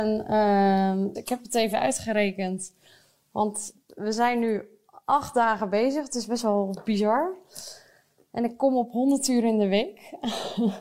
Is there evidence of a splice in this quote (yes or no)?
yes